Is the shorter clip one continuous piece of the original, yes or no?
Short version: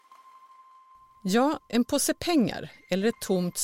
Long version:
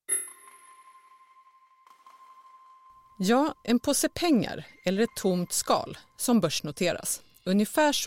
yes